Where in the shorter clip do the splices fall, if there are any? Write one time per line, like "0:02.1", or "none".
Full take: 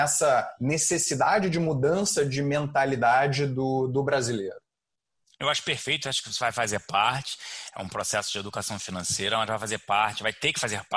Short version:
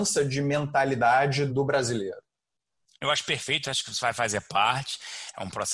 0:01.5